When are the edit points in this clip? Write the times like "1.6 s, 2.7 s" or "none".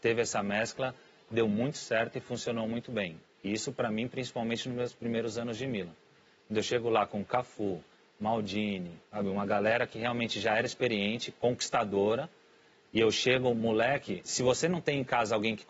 9.1 s, 14.2 s